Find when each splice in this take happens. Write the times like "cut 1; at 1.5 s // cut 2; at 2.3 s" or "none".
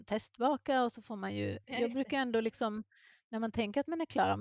none